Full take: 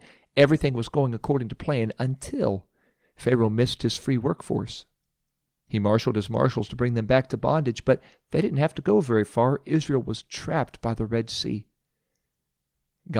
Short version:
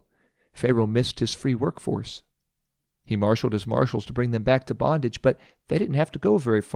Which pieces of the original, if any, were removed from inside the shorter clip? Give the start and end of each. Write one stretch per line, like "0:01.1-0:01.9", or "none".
none